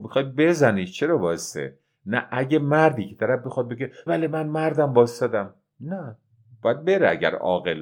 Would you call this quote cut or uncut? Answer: cut